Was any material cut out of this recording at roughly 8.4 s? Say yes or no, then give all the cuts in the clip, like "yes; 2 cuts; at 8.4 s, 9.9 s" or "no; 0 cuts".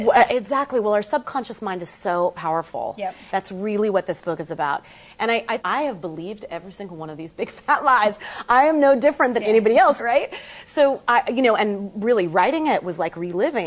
no; 3 cuts; at 3.3 s, 5.6 s, 10.0 s